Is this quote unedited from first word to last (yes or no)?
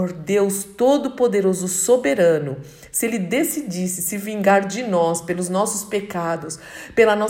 yes